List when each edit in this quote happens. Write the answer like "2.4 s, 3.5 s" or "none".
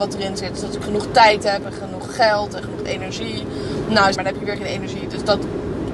4.1 s